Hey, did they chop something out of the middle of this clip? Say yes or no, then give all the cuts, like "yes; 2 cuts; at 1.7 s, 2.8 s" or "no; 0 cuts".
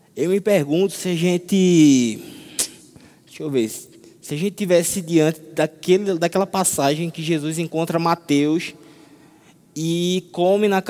no; 0 cuts